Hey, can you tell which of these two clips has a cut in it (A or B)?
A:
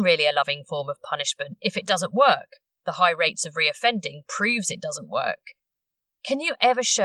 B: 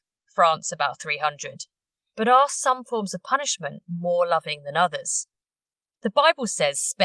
B